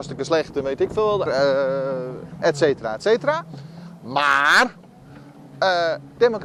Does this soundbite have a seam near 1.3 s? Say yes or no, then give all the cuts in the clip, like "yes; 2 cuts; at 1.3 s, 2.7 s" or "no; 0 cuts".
yes; 1 cut; at 1.3 s